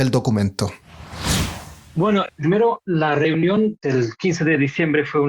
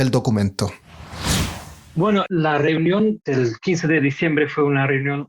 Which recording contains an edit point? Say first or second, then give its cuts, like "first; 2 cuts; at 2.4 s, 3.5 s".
second; 1 cut; at 2.3 s